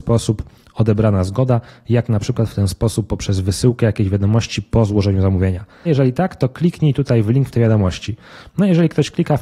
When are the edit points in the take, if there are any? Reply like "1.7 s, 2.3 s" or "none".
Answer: 5.8 s